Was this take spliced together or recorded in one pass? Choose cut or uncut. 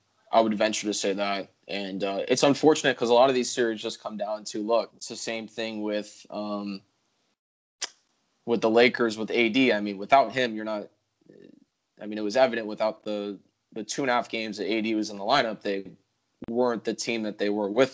cut